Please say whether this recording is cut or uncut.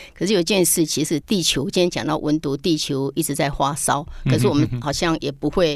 cut